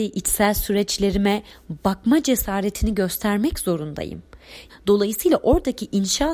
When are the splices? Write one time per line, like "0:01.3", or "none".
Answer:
0:04.7

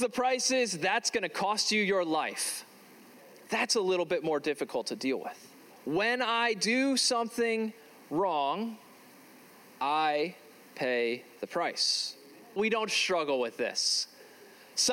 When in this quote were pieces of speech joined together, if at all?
0:05.7
0:12.6

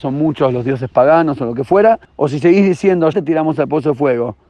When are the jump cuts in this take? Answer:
0:02.0
0:03.1

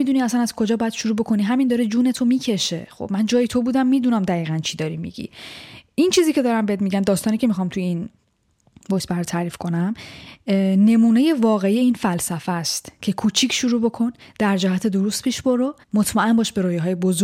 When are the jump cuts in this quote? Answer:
0:15.8

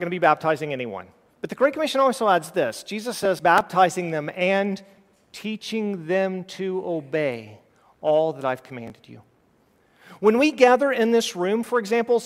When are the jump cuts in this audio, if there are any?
0:01.3
0:03.4

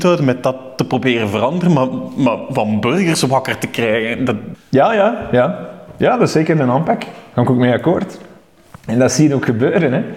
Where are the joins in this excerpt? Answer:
0:04.5

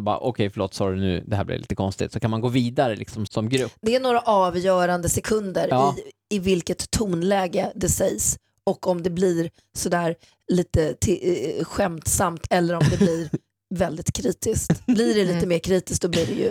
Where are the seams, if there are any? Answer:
0:03.3

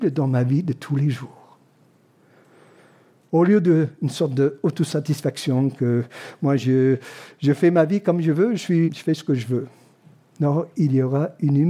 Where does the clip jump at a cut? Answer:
0:08.9

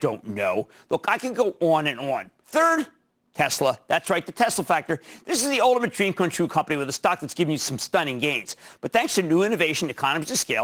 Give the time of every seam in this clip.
0:02.4
0:08.7

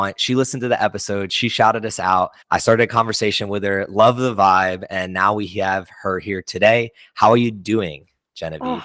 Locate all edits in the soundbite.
0:02.4

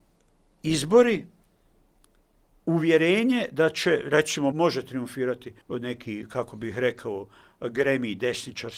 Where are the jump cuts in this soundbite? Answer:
0:04.5
0:05.6

